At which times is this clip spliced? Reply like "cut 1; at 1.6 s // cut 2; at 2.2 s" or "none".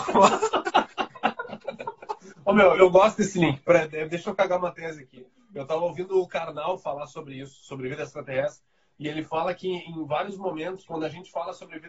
cut 1; at 2.8 s